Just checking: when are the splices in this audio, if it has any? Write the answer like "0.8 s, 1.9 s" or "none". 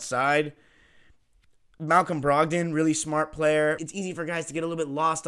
3.8 s